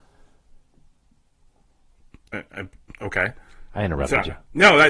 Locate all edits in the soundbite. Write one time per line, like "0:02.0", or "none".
none